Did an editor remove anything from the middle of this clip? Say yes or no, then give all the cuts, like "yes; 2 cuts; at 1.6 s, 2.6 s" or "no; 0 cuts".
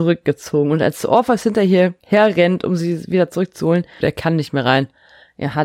yes; 2 cuts; at 2.0 s, 4.0 s